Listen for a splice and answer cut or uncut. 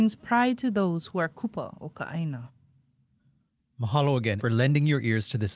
cut